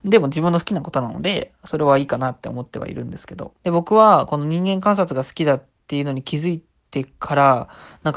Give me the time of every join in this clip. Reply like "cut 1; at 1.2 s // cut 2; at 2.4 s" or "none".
cut 1; at 3.6 s